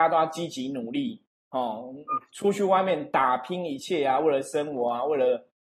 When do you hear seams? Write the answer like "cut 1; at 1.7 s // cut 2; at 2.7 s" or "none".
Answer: none